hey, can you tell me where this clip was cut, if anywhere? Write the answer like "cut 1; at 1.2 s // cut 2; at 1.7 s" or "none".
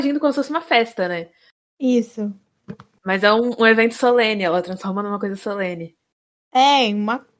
none